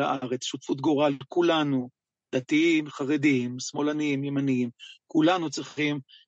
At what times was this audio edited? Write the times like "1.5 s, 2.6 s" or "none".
2.9 s